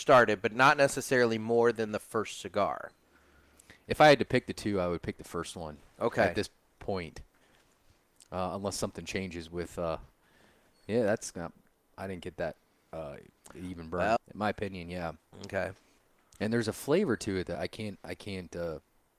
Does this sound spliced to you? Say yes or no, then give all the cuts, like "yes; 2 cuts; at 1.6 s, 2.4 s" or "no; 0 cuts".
yes; 2 cuts; at 14.2 s, 17.5 s